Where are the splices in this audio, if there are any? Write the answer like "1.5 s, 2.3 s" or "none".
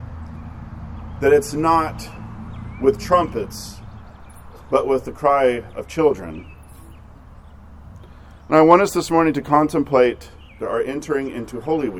10.6 s